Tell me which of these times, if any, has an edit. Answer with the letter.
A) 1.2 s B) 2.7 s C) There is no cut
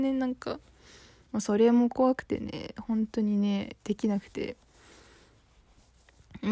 A